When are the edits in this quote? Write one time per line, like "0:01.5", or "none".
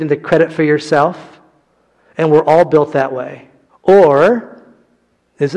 0:03.7